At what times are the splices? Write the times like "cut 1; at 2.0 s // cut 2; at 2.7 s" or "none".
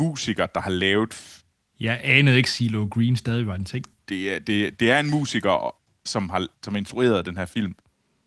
cut 1; at 1.7 s // cut 2; at 4.0 s